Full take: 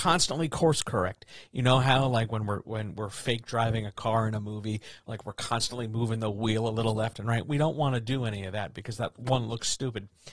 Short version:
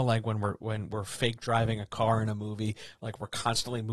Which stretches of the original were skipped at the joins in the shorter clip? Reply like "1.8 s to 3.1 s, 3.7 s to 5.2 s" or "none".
none